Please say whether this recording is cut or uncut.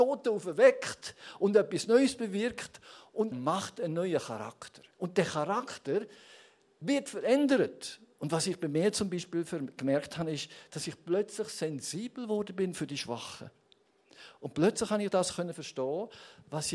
cut